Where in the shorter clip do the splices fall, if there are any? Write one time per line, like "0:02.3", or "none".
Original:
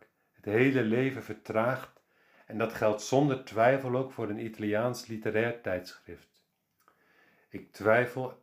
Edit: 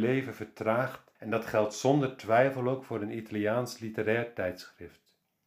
0:01.2